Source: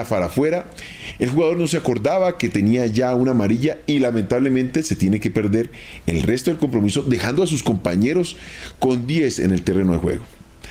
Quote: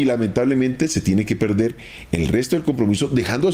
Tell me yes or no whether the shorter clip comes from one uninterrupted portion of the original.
yes